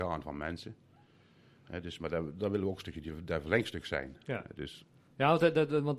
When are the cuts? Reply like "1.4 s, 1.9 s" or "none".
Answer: none